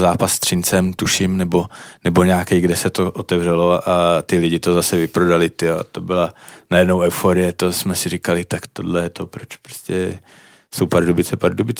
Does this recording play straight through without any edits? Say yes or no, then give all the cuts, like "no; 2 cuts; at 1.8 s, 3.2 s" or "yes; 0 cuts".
no; 1 cut; at 8.7 s